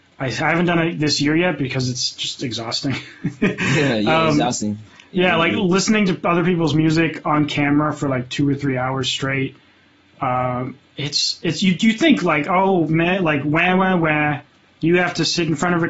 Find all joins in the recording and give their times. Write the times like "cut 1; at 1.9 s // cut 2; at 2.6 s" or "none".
none